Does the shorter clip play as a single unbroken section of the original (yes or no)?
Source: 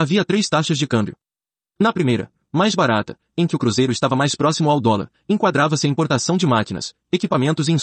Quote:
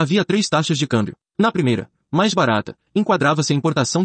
no